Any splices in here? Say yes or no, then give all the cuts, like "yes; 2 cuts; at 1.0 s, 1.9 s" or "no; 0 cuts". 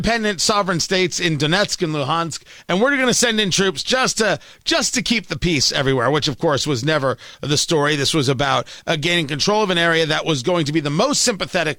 no; 0 cuts